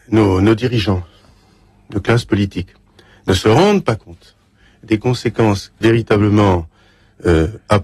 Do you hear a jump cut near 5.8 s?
yes; 1 cut; at 5.8 s

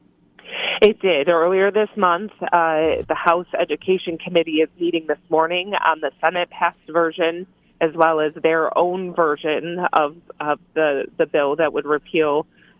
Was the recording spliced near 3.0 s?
yes; 1 cut; at 3.0 s

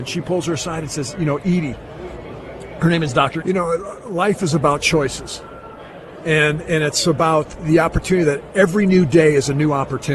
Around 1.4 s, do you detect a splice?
no; 1 cut; at 3.4 s

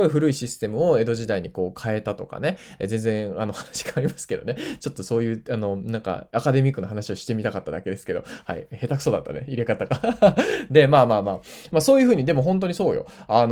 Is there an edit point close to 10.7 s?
no; 0 cuts

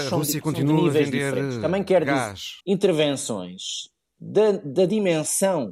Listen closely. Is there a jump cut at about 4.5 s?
no; 1 cut; at 2.6 s

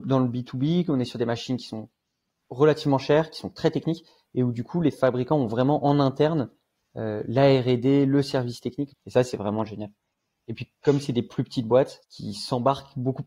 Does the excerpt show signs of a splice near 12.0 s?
yes; 2 cuts; at 8.9 s, 12.0 s

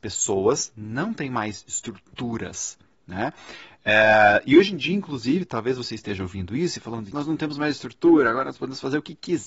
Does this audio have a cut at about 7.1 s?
yes; 1 cut; at 7.1 s

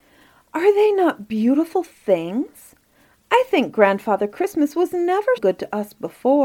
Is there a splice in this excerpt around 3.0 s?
no; 1 cut; at 5.4 s

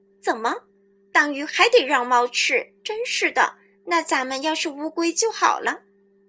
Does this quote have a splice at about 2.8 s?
yes; 1 cut; at 2.8 s

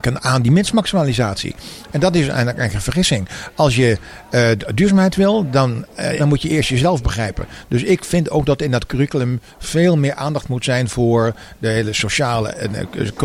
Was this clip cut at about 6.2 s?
yes; 1 cut; at 6.2 s

